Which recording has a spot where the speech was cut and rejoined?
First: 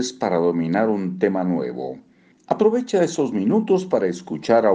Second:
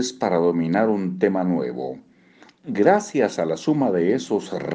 first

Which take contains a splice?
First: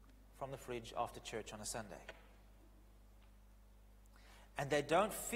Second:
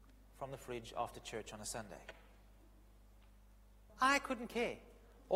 second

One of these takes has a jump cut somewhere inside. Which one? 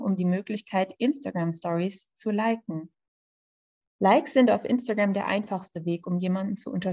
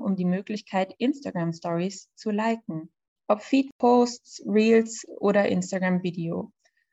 second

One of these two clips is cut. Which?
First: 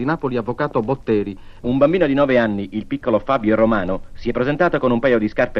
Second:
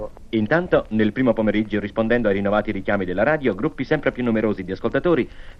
first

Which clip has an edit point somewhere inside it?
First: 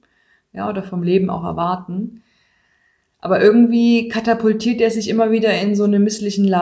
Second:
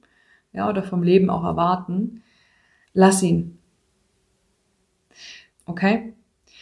second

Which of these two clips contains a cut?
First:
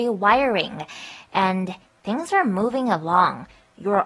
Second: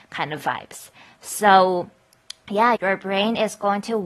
second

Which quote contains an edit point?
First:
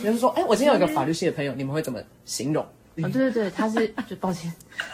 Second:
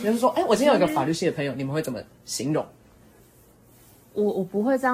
first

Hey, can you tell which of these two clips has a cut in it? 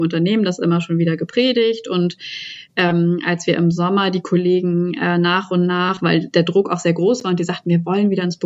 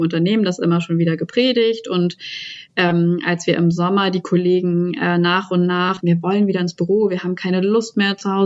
second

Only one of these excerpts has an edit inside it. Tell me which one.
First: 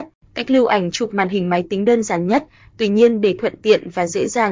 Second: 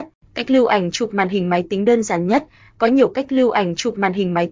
first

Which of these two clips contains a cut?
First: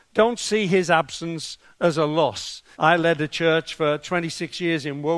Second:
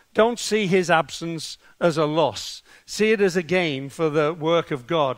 first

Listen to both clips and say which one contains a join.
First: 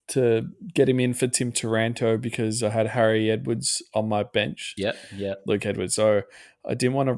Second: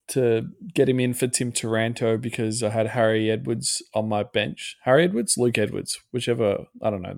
first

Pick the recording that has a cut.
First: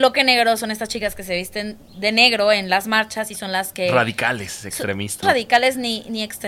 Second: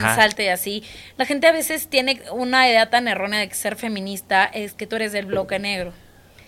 first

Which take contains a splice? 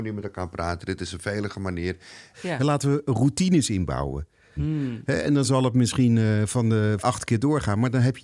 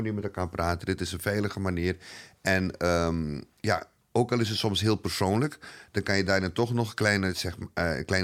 first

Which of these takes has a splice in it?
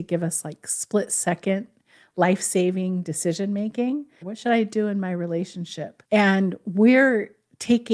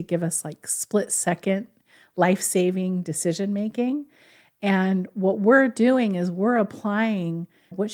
first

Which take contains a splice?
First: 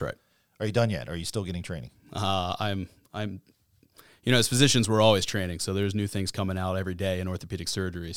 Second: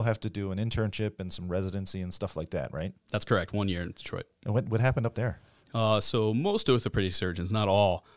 second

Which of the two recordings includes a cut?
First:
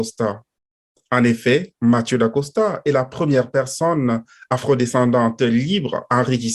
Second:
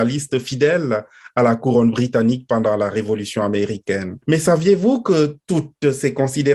second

